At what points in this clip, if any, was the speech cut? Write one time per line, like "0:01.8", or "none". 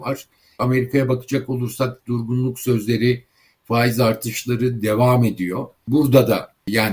none